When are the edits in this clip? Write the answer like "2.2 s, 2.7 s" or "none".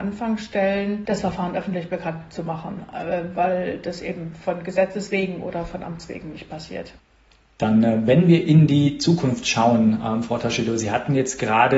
none